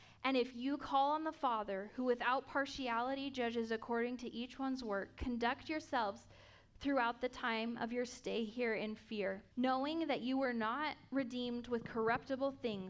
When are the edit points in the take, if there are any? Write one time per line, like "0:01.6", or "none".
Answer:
0:09.5